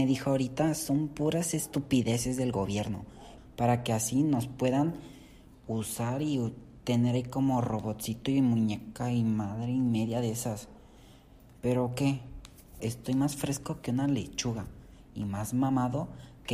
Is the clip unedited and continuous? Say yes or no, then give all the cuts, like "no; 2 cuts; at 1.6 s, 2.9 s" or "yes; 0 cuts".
no; 2 cuts; at 3.4 s, 12.8 s